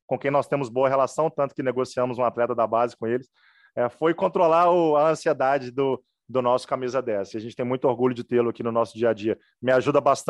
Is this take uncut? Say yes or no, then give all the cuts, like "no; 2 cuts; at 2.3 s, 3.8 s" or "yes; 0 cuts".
yes; 0 cuts